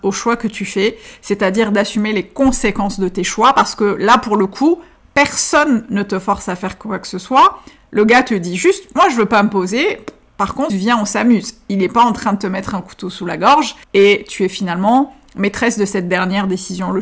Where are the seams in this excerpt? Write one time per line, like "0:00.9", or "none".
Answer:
0:10.7
0:13.8